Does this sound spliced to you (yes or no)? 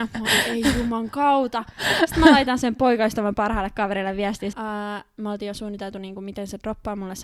yes